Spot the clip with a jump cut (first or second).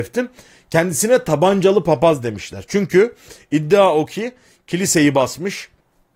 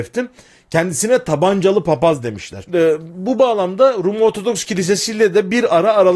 second